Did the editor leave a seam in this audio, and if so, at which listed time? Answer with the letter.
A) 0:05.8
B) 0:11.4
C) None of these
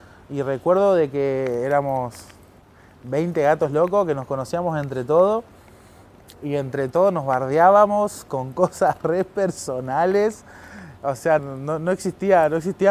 B